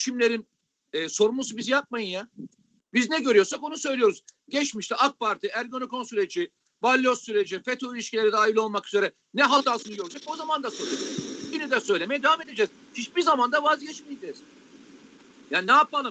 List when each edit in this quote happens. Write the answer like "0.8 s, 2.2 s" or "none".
none

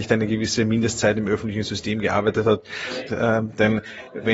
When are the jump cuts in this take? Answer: 3.1 s

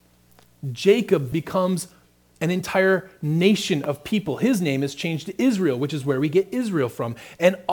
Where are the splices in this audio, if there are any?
1.3 s

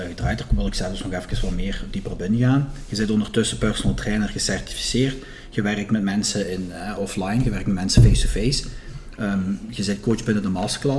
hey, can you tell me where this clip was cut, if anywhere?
none

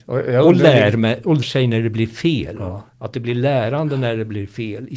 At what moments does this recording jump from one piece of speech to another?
1.4 s, 2.9 s

